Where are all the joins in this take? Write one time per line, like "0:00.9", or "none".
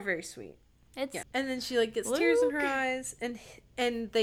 0:01.2